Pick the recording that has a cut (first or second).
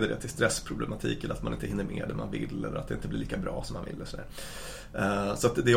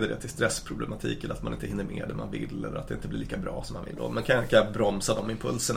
second